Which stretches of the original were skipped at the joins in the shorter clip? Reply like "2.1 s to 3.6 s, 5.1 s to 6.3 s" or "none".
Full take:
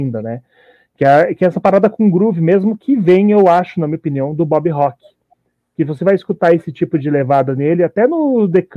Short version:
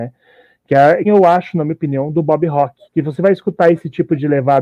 1.3 s to 3.3 s, 5.1 s to 5.7 s